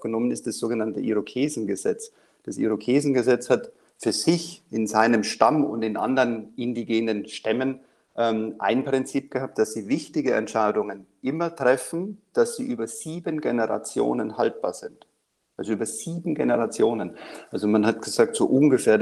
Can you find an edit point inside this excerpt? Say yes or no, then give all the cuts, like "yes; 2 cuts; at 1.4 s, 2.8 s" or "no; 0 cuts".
no; 0 cuts